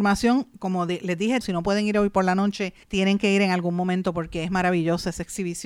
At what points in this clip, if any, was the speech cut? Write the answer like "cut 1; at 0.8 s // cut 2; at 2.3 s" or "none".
cut 1; at 1.4 s // cut 2; at 2.8 s